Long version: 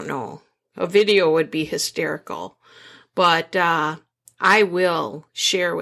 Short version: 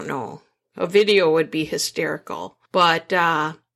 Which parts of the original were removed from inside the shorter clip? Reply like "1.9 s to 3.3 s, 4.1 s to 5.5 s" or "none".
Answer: 2.6 s to 3.1 s